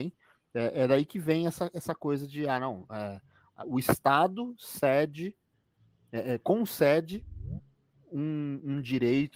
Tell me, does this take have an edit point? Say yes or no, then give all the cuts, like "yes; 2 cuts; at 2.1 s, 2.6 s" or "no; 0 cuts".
no; 0 cuts